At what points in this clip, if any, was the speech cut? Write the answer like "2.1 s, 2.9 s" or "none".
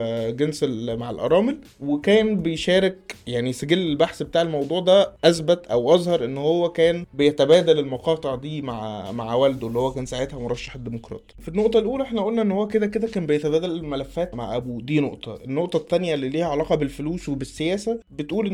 11.3 s, 14.3 s